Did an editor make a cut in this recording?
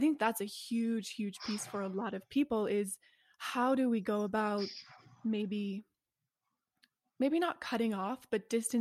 no; 0 cuts

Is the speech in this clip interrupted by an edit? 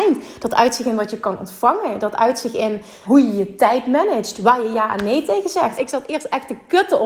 yes; 2 cuts; at 3.1 s, 5.8 s

